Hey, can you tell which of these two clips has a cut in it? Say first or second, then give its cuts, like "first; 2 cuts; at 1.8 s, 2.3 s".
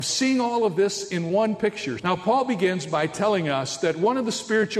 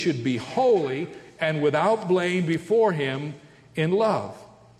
first; 1 cut; at 2.0 s